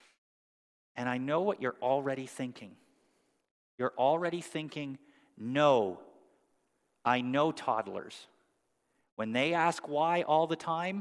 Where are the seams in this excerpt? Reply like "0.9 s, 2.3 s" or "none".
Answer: none